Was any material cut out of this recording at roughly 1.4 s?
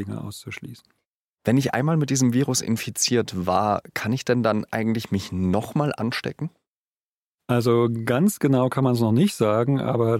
no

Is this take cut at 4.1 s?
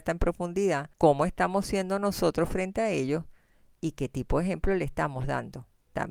no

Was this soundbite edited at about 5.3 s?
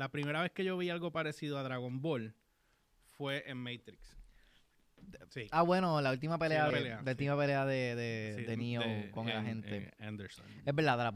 yes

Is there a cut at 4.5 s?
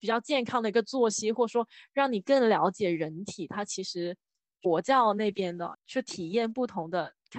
yes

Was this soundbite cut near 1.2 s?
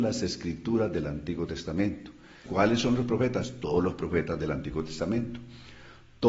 no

